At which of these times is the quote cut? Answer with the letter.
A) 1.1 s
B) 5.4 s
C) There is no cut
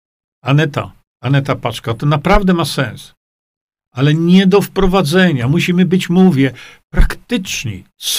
C